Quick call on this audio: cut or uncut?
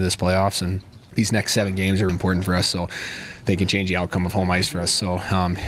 cut